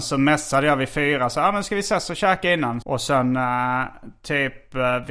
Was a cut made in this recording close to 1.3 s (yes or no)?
no